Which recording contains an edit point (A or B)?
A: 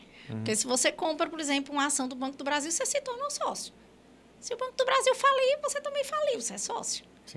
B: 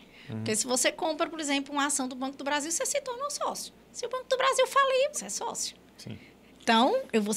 B